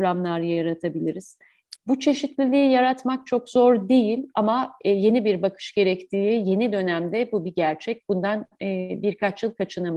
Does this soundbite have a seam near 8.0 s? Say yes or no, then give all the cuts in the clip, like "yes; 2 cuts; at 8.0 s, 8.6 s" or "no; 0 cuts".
no; 1 cut; at 1.8 s